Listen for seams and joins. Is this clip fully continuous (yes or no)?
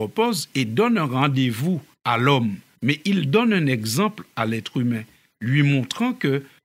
no